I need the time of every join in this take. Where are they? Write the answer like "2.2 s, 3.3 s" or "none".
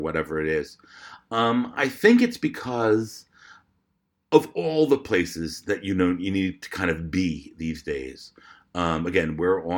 none